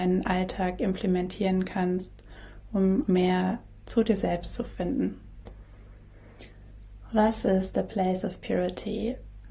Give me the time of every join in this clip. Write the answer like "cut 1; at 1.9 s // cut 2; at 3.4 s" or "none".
cut 1; at 3.0 s